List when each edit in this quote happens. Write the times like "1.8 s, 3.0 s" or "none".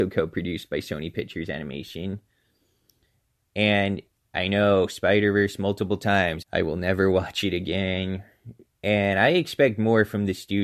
6.4 s, 8.7 s